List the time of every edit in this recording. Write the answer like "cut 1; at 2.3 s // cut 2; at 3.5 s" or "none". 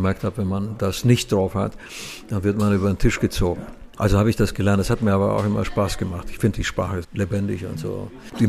cut 1; at 7.0 s

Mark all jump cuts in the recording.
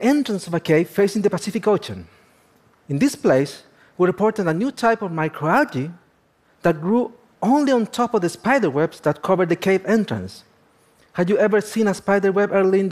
none

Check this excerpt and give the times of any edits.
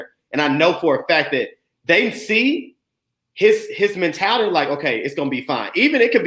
none

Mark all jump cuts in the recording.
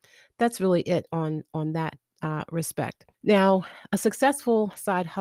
cut 1; at 3.1 s

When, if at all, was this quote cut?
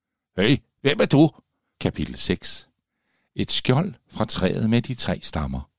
cut 1; at 1.7 s

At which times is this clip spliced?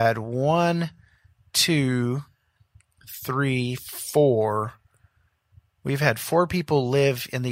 none

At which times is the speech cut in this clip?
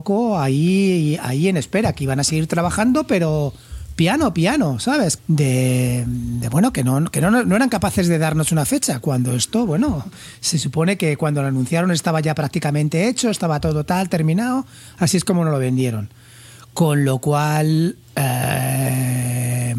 cut 1; at 5.2 s

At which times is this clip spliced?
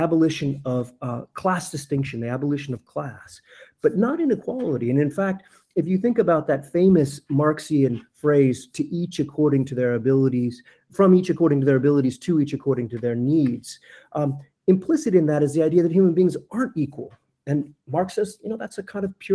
none

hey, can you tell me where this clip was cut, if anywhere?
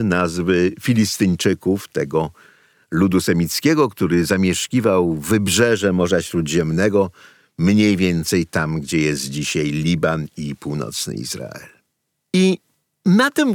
none

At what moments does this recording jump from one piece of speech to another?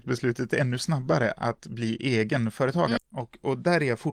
cut 1; at 3.0 s

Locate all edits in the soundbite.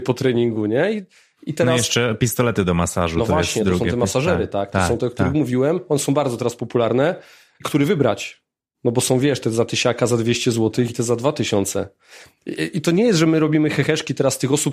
cut 1; at 10.9 s

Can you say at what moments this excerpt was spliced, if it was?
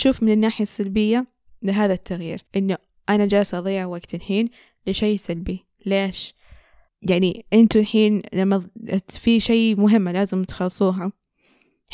cut 1; at 2.5 s // cut 2; at 6.9 s

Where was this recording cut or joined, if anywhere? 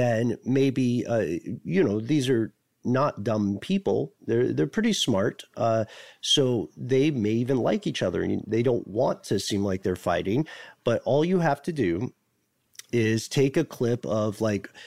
cut 1; at 4.2 s

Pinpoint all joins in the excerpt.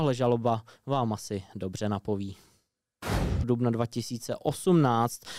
cut 1; at 3.4 s

